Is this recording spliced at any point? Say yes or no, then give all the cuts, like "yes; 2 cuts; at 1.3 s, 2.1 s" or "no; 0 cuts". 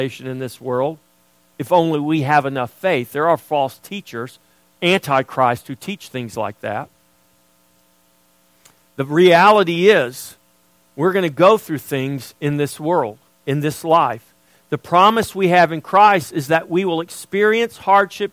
no; 0 cuts